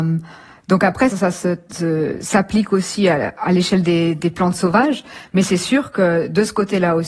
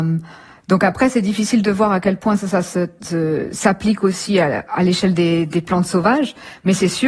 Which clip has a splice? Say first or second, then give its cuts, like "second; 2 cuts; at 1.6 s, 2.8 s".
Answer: first; 1 cut; at 1.1 s